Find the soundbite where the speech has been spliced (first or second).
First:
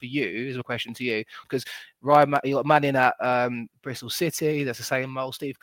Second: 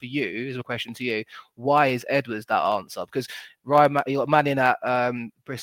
first